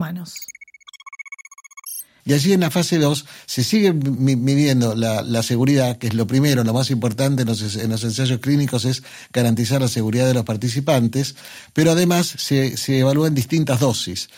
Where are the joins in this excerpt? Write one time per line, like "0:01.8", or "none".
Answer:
0:02.2

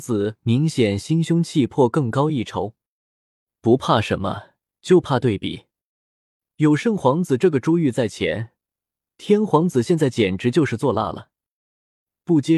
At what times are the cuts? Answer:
none

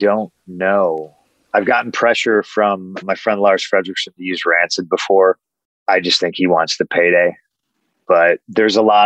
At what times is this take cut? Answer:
0:03.0

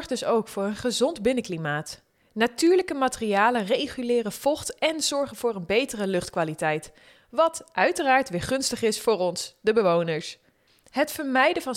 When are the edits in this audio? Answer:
none

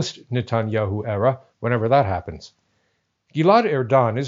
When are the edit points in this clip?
0:03.3

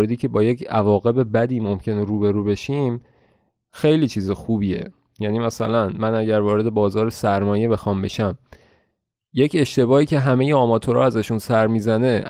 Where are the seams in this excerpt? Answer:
none

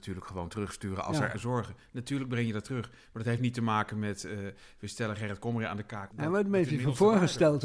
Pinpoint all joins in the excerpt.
0:01.3

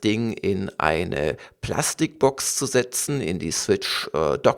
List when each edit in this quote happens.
none

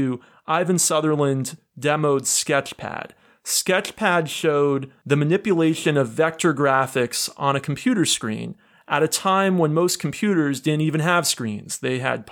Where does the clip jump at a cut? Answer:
none

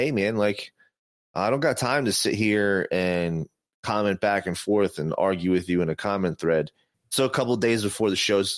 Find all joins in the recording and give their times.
0:06.9

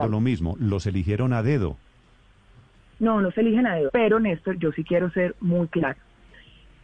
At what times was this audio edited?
0:03.9

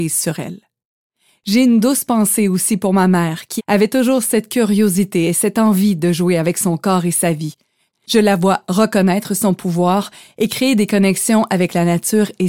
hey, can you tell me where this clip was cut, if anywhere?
0:03.6
0:07.9

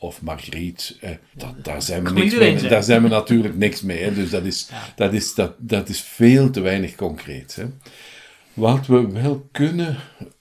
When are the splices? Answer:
0:01.3

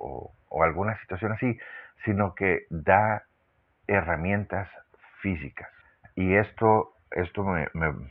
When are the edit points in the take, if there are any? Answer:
none

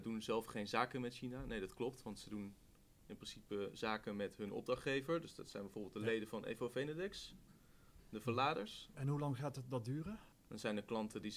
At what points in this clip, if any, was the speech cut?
0:08.9
0:10.3

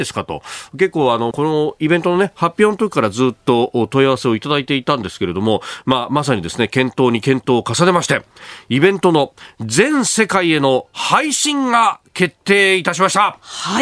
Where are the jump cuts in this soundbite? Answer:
0:01.3

